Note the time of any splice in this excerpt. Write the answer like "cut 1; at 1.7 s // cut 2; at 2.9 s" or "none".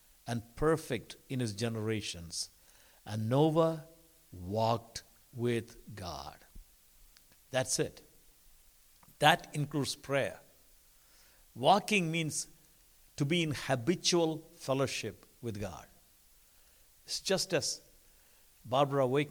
none